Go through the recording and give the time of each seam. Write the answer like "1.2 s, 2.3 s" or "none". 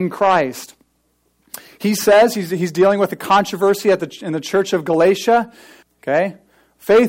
5.8 s